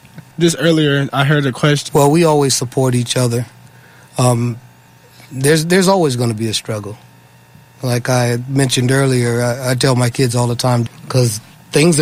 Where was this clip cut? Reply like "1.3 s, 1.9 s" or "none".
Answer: 1.9 s, 10.9 s